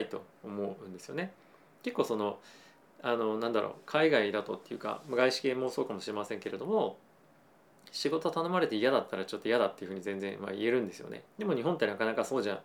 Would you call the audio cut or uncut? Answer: cut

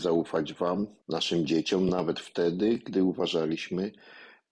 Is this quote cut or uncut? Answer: uncut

